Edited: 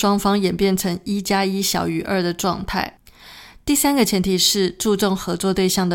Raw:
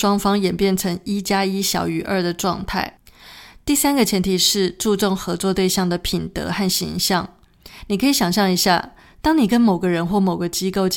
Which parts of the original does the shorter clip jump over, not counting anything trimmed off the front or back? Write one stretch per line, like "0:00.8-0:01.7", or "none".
none